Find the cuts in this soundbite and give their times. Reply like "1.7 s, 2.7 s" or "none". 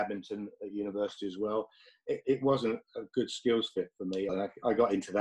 4.3 s